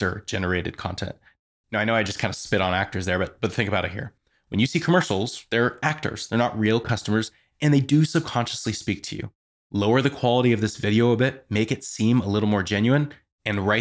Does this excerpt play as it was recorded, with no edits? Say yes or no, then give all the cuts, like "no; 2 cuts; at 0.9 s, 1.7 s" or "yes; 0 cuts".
yes; 0 cuts